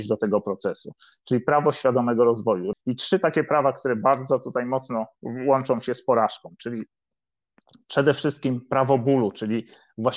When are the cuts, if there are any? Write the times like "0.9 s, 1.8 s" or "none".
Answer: 2.7 s